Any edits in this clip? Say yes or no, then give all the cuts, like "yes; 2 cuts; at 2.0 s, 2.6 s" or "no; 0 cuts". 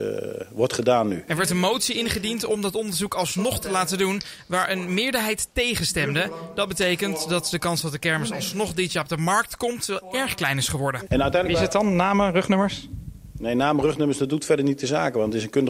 yes; 2 cuts; at 1.3 s, 11.1 s